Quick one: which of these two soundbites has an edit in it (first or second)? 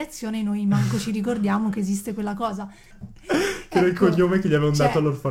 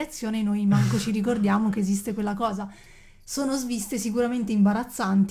first